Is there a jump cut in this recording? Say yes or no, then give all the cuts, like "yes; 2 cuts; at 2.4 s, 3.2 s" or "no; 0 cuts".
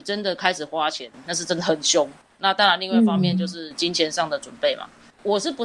yes; 1 cut; at 2.4 s